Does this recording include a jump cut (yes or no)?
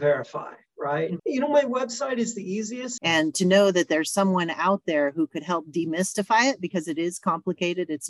yes